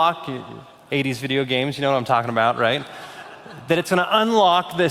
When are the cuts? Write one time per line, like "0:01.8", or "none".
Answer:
none